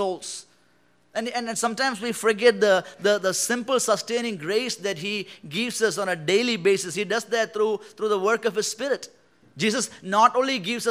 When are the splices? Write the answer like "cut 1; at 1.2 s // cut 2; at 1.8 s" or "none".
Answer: cut 1; at 9.4 s